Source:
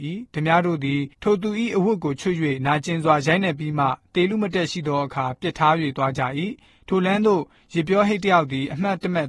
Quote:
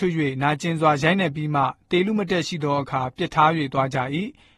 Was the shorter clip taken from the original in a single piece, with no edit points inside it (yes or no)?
yes